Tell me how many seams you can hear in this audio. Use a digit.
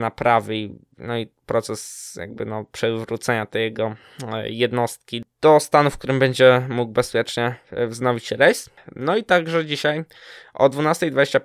0